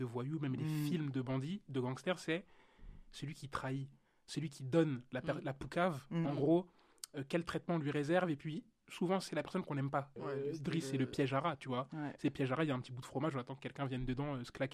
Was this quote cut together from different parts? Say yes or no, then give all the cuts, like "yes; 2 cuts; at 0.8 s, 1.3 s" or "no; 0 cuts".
yes; 1 cut; at 10.2 s